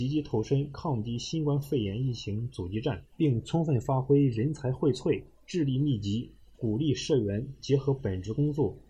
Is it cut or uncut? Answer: cut